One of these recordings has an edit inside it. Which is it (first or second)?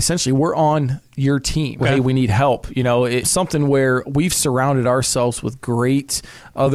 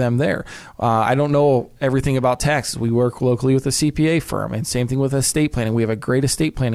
first